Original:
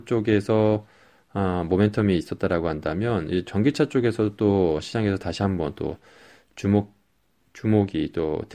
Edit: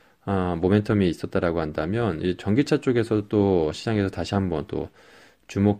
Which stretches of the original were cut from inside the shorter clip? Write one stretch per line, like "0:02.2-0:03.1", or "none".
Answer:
none